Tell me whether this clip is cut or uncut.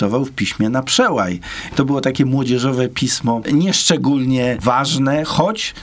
cut